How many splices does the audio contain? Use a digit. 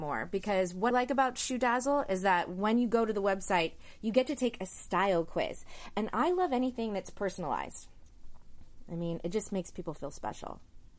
1